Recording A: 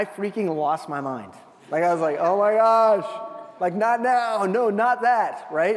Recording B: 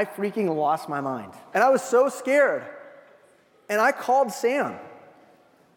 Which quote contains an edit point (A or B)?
B